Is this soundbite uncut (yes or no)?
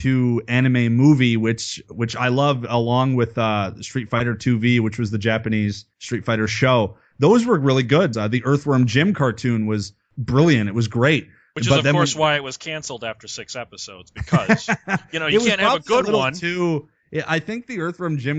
no